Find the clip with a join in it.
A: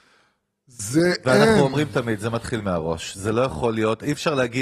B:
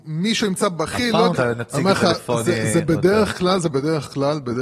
B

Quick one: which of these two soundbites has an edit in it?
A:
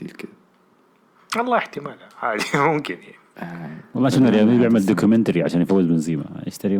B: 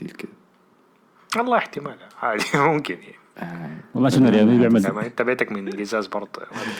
B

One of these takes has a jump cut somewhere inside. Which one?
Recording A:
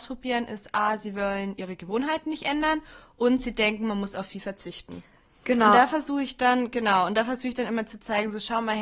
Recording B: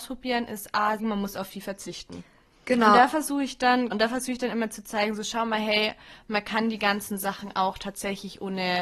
B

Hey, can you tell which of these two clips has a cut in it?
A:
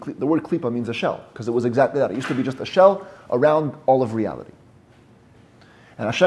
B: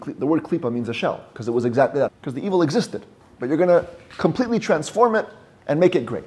B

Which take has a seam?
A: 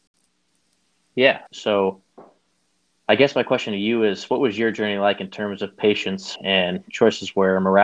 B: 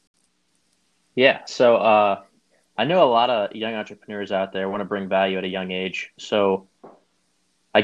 A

